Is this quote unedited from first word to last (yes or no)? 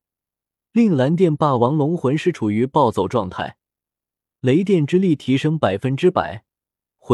yes